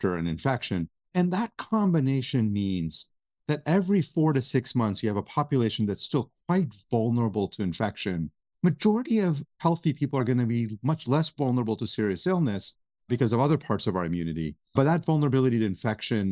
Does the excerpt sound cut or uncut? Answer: uncut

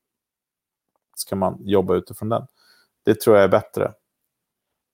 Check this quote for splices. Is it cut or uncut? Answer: cut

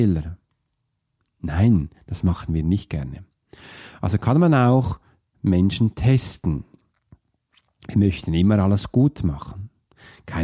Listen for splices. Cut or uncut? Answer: uncut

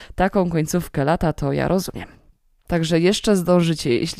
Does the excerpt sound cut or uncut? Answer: cut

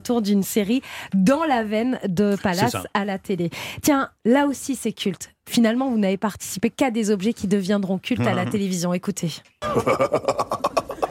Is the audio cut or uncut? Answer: uncut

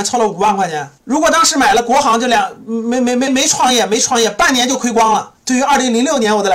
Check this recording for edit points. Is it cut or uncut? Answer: cut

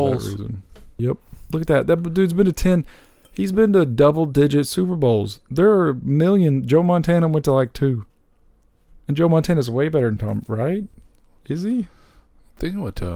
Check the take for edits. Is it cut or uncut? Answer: cut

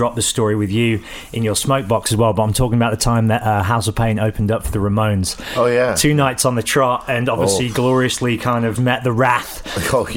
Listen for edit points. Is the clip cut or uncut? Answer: cut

